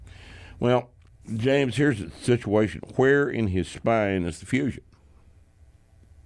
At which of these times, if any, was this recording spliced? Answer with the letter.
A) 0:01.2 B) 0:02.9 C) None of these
A